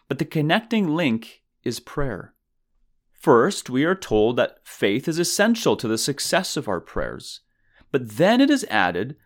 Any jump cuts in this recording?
no; 0 cuts

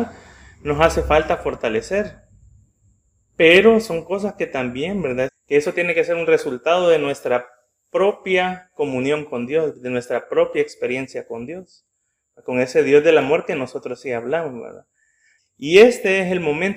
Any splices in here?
yes; 2 cuts; at 5.3 s, 15.4 s

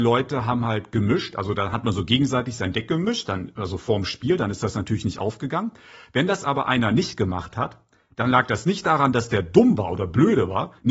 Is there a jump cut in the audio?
no; 0 cuts

